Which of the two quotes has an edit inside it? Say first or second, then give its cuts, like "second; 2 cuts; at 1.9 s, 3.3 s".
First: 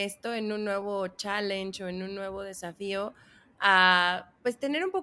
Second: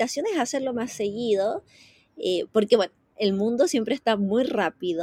first; 1 cut; at 3.5 s